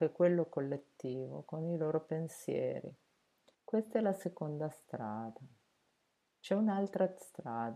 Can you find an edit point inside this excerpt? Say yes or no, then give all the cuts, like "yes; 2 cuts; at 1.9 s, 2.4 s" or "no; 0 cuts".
yes; 1 cut; at 3.5 s